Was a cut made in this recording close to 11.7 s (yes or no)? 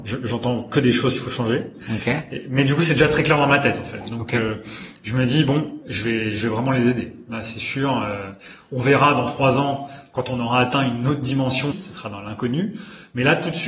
yes